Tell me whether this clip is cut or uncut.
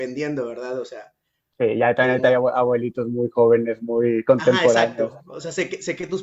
uncut